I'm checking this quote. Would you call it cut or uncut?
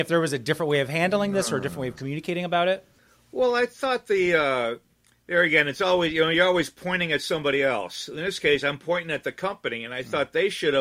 uncut